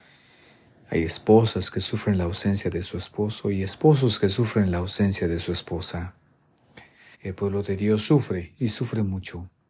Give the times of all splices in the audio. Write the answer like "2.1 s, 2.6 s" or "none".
7.1 s